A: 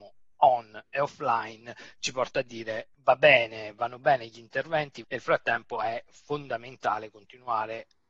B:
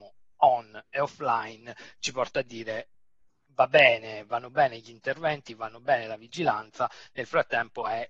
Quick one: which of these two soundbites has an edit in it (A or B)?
A